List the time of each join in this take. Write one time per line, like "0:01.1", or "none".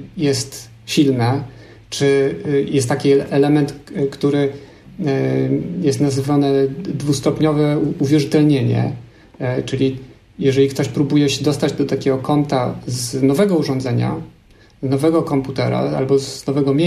none

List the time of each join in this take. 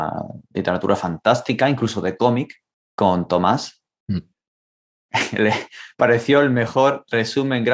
0:02.7
0:05.1

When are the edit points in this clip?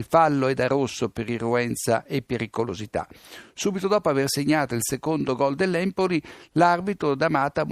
none

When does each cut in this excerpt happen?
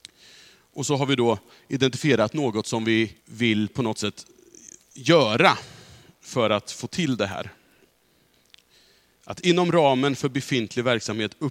0:03.2

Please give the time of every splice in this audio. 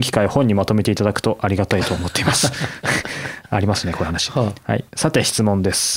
none

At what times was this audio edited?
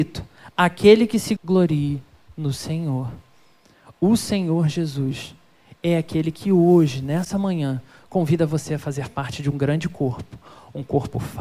0:01.4

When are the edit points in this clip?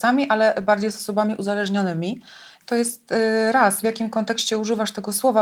0:02.6
0:03.8

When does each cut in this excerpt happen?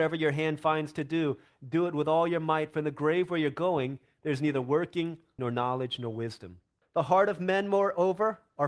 0:05.4
0:06.8

